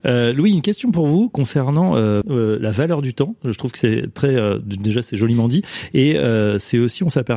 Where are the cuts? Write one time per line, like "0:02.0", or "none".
0:02.2